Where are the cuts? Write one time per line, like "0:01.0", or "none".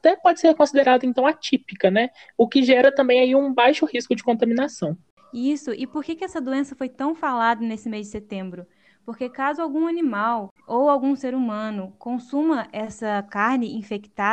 none